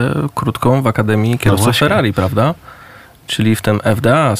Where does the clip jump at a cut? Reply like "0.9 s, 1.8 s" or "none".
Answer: none